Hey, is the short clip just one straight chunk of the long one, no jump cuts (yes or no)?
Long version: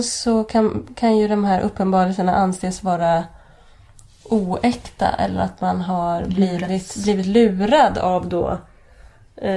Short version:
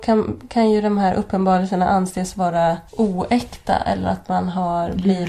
no